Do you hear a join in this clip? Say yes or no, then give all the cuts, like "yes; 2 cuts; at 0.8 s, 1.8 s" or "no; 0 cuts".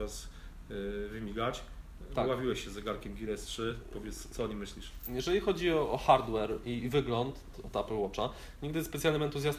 yes; 1 cut; at 7.5 s